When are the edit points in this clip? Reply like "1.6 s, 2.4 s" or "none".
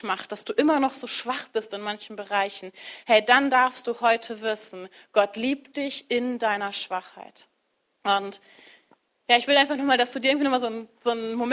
8.0 s